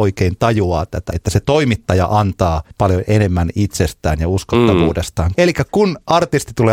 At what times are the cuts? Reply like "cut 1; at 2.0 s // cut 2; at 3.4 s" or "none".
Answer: cut 1; at 1.1 s // cut 2; at 2.7 s // cut 3; at 5.3 s